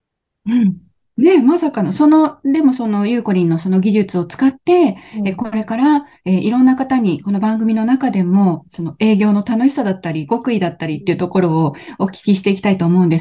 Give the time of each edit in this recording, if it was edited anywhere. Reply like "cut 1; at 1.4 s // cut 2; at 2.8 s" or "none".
cut 1; at 1.0 s